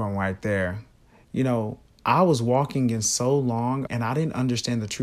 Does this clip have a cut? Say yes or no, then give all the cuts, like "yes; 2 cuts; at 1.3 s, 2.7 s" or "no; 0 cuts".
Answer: yes; 1 cut; at 3.9 s